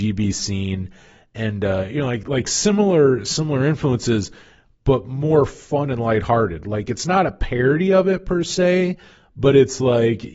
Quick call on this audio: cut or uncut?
uncut